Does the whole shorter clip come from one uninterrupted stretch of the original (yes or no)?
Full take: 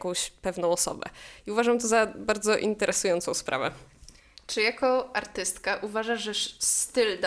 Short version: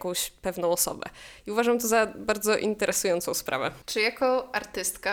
no